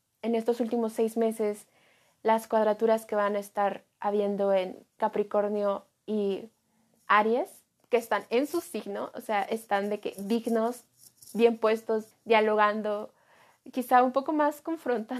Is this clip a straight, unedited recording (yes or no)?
no